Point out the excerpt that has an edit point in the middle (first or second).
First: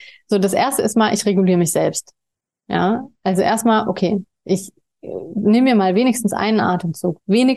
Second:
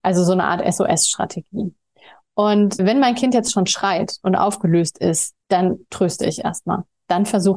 second